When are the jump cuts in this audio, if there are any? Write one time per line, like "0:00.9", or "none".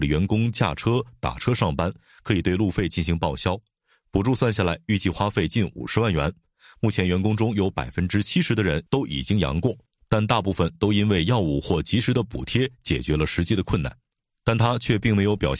0:14.3